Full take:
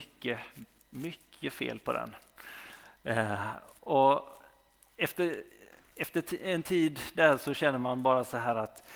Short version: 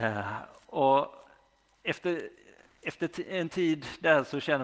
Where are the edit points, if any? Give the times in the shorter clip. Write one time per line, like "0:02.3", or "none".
none